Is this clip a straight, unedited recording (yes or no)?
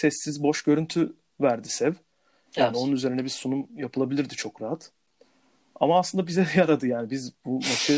yes